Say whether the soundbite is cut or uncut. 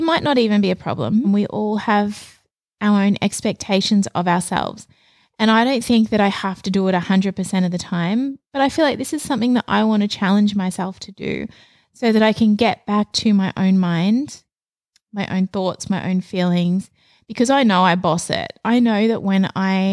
cut